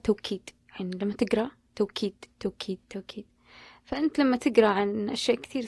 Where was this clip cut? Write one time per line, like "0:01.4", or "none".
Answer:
0:02.8